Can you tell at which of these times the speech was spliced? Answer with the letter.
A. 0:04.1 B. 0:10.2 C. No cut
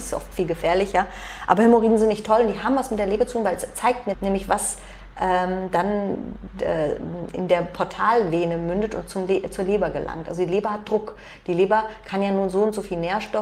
A